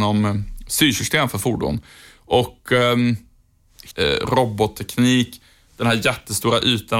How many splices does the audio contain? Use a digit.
2